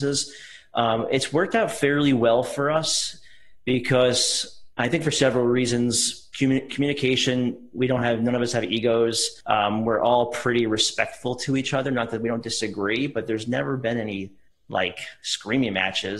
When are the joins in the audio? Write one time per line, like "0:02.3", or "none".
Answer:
none